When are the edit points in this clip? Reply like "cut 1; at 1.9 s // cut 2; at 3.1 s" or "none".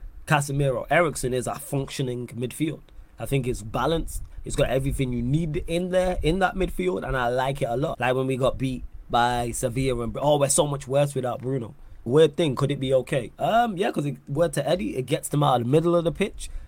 cut 1; at 7.9 s // cut 2; at 12.1 s